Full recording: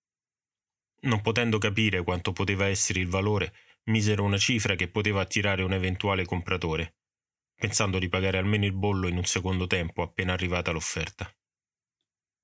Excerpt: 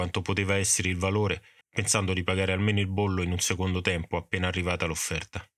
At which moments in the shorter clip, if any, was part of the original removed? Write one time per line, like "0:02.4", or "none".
0:01.6